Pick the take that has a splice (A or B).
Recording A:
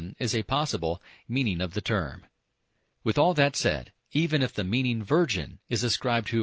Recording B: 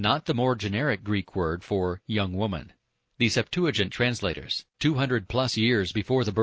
A